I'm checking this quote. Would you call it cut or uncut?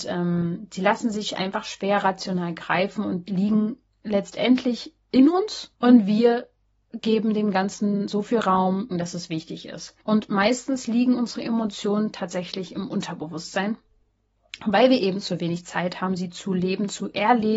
cut